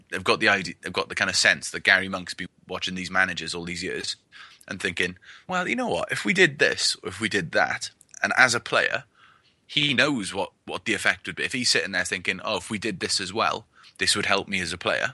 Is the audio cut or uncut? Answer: cut